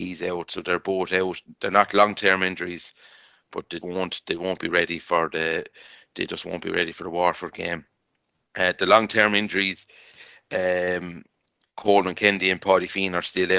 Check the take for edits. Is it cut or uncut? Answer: cut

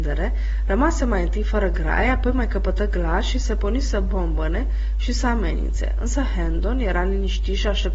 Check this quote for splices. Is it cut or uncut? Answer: uncut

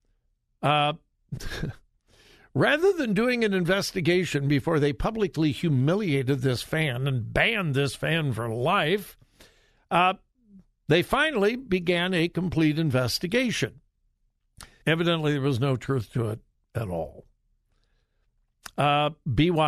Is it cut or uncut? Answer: cut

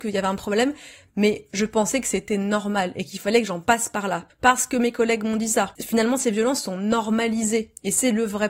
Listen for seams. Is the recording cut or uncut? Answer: cut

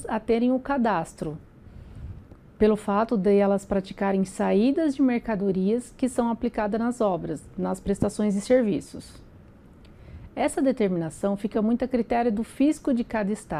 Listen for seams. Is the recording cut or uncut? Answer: uncut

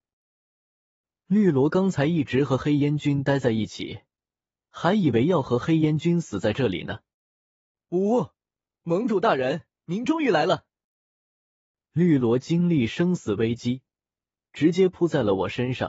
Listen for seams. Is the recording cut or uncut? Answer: cut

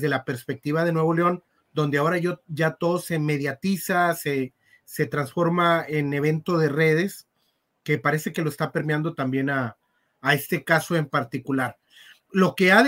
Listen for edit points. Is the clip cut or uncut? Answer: uncut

